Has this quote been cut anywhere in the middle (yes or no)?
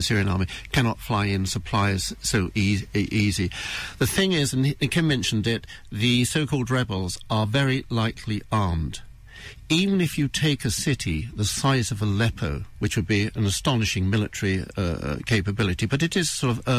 no